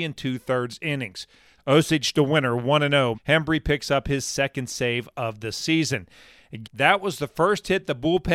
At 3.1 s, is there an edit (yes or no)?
yes